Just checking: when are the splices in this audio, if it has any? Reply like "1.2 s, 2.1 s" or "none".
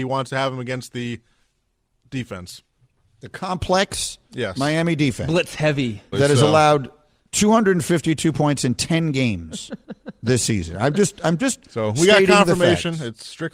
6.1 s